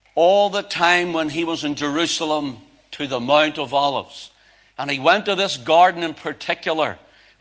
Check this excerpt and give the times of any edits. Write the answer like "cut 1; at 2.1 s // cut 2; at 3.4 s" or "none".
none